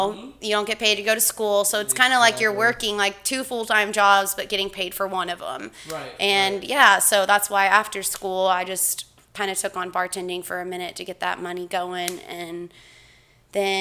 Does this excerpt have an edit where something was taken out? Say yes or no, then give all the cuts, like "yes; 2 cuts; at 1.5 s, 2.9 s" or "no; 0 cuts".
no; 0 cuts